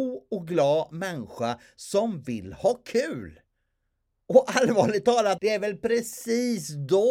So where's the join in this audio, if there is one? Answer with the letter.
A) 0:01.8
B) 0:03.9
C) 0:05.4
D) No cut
C